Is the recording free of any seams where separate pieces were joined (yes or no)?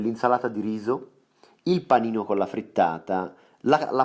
yes